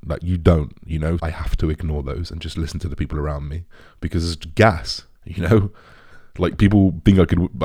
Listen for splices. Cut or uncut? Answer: cut